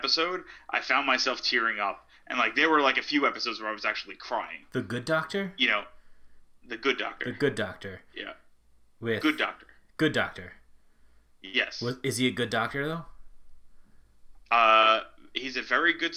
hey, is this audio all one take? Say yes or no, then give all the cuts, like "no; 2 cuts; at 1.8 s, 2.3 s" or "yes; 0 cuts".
yes; 0 cuts